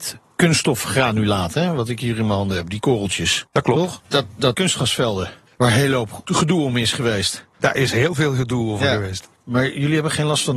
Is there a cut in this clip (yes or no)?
yes